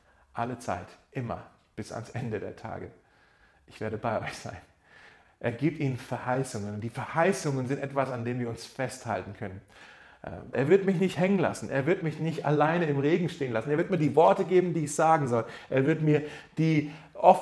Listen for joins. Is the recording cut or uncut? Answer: cut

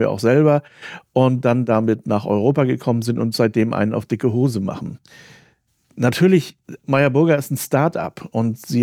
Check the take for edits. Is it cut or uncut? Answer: cut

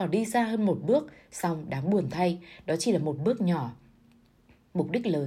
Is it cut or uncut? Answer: uncut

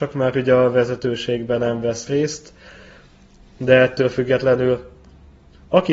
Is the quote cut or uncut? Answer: uncut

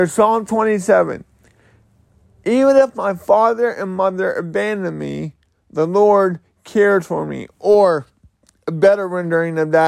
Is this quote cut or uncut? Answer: uncut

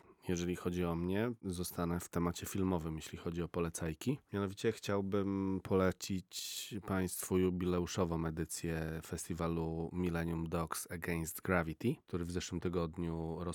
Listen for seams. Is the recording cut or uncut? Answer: uncut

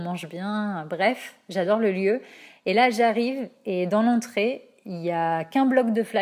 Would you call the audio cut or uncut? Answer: uncut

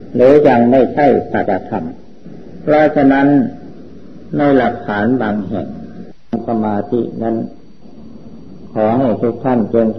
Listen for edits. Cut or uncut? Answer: cut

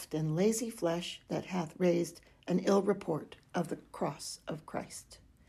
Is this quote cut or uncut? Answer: uncut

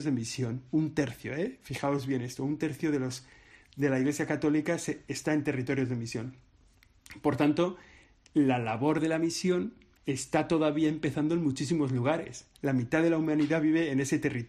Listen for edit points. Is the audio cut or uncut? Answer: cut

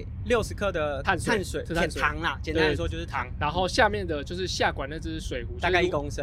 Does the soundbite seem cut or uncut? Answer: uncut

